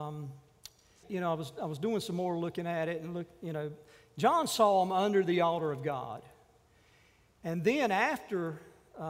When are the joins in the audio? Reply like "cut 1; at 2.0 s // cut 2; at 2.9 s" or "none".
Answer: cut 1; at 1.0 s